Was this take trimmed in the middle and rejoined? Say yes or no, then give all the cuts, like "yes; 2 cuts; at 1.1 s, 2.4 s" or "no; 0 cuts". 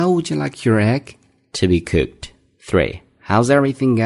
no; 0 cuts